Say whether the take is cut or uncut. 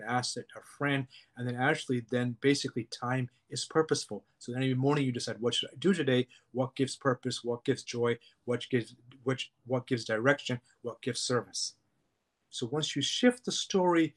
uncut